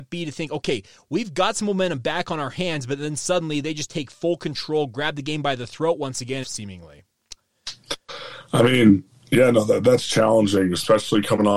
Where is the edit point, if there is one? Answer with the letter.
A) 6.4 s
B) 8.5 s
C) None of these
A